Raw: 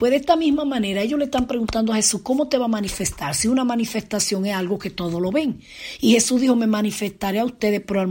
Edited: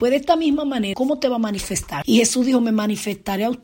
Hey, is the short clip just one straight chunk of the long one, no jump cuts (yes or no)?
no